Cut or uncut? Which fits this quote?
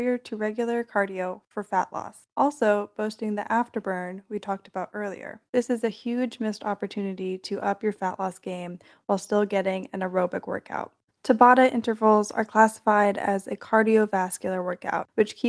cut